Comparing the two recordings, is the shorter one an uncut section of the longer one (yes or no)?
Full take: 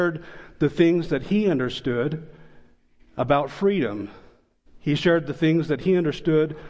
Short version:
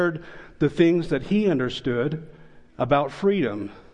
no